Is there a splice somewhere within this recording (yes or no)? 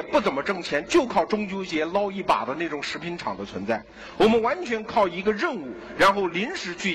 no